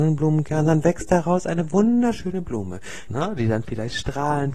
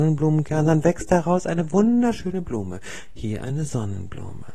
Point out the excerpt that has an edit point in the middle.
first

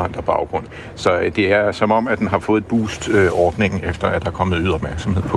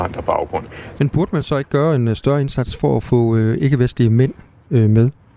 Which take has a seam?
second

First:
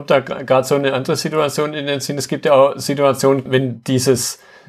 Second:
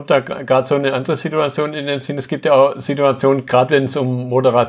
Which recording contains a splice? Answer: first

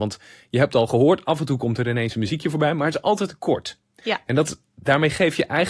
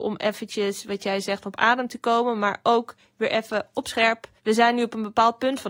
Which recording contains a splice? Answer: second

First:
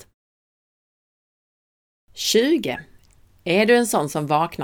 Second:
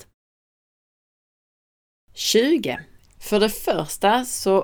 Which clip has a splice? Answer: second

